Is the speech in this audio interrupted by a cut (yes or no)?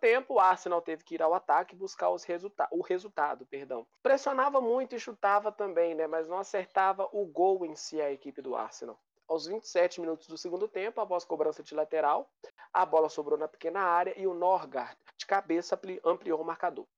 yes